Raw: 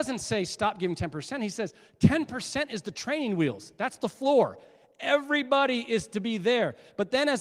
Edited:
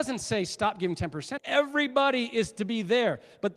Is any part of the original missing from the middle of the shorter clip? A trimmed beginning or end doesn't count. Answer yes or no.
yes